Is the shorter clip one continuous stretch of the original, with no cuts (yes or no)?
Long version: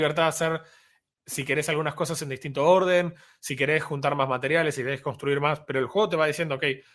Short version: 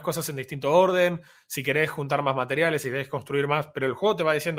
yes